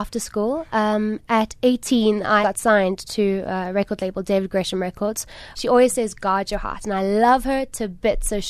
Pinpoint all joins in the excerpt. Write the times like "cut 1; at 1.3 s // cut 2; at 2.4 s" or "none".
cut 1; at 2.4 s // cut 2; at 5.5 s